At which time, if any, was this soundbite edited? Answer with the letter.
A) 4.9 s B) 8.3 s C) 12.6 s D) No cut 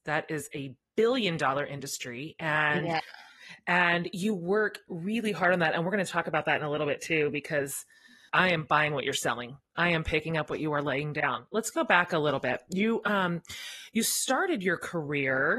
B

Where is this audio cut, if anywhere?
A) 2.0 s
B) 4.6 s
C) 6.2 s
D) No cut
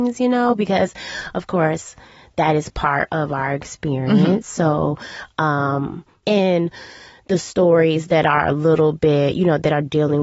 C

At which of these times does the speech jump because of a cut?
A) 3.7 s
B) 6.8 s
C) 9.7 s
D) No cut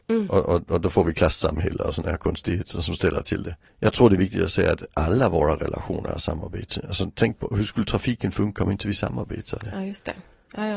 A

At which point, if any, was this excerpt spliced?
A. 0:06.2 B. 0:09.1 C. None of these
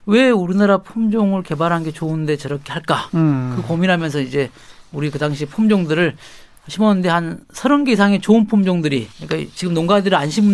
B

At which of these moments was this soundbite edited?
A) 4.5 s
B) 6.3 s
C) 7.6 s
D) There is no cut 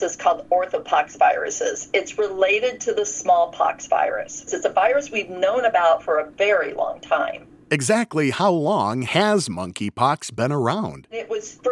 A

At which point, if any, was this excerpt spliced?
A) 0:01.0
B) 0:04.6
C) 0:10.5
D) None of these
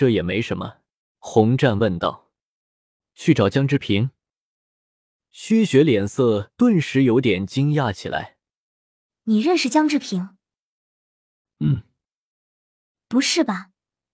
A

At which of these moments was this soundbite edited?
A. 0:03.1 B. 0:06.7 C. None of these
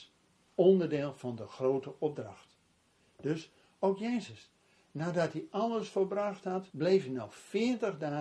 B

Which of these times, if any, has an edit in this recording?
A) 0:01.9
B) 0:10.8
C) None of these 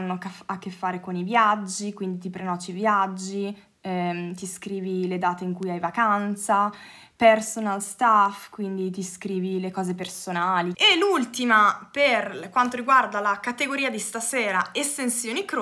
B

